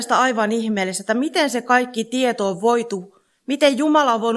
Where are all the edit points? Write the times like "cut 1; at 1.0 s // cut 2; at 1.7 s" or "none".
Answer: none